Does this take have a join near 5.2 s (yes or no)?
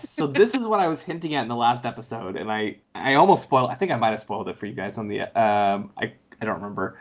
no